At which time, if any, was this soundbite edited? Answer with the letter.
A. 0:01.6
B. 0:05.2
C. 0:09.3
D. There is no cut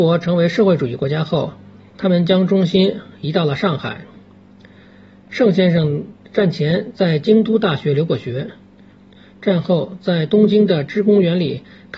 D